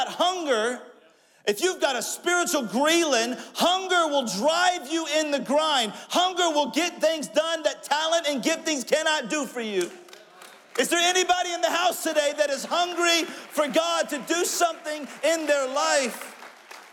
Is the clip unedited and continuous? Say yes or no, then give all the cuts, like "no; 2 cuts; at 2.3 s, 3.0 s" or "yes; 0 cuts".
yes; 0 cuts